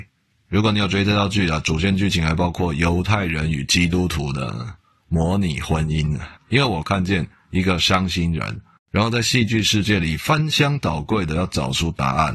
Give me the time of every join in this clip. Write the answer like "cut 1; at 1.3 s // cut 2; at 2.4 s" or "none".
cut 1; at 6.4 s // cut 2; at 8.8 s